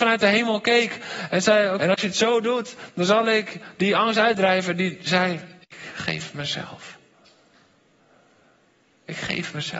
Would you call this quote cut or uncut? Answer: cut